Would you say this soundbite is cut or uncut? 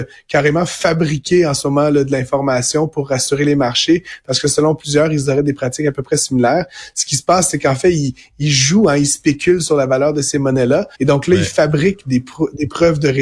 cut